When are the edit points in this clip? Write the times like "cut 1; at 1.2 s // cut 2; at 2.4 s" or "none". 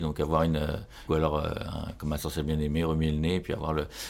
cut 1; at 1.1 s